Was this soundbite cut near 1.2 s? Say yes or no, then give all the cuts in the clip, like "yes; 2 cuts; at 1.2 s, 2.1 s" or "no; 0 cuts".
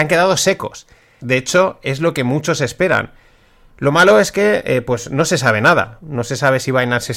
yes; 1 cut; at 1.2 s